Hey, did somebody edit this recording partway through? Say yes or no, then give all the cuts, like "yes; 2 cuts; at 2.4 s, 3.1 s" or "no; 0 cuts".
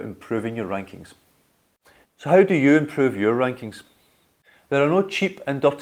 yes; 1 cut; at 2.0 s